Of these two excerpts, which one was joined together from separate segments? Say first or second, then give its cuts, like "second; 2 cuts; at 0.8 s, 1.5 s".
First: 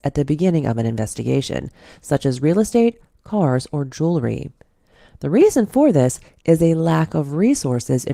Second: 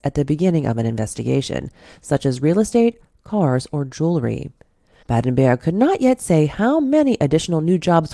second; 1 cut; at 5.0 s